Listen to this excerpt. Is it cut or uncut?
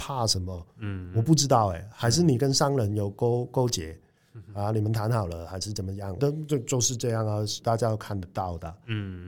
cut